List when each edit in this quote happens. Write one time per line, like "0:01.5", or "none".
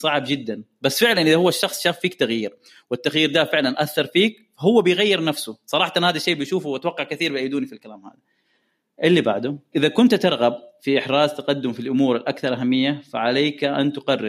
0:09.7